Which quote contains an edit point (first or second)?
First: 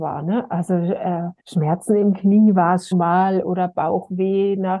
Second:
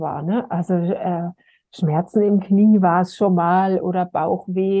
first